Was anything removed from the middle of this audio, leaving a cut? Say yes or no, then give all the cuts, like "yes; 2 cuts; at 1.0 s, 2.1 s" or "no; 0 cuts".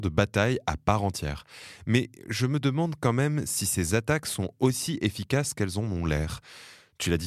no; 0 cuts